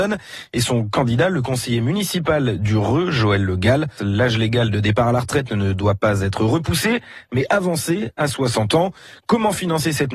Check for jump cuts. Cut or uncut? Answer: cut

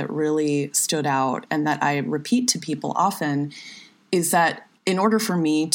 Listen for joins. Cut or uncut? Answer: cut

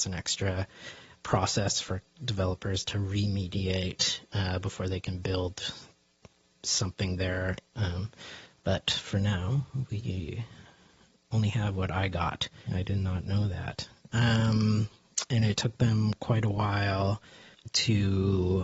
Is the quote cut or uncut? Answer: cut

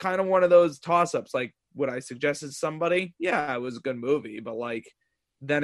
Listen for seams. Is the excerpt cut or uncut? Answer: uncut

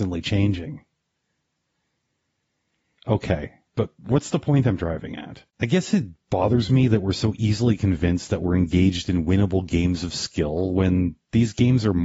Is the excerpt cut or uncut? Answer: cut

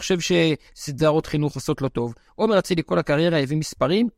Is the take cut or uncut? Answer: uncut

